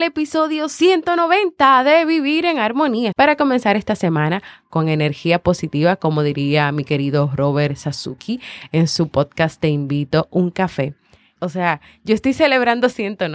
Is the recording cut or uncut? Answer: cut